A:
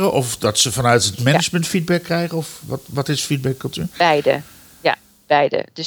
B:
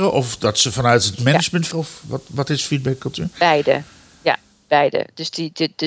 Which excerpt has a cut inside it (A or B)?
B